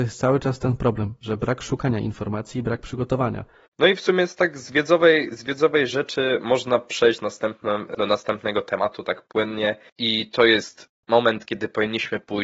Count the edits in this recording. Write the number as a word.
one